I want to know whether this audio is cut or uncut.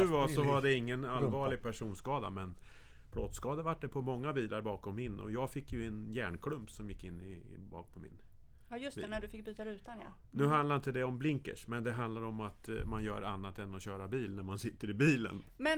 uncut